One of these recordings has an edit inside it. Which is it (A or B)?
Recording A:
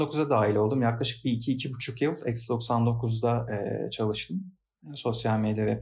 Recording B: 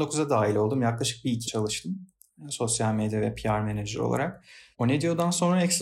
B